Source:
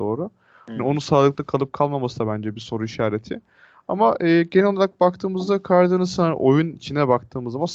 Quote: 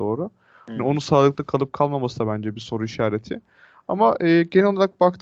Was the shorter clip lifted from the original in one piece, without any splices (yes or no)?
yes